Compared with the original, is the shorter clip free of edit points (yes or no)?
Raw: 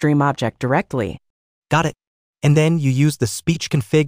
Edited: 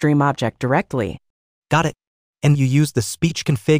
no